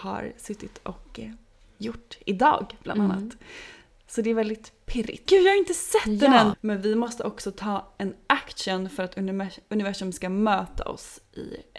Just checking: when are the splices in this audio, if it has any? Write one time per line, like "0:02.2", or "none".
0:05.3
0:06.5